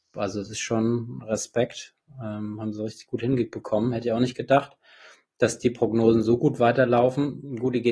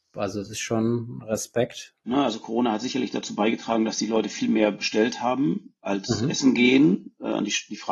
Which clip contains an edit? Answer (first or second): second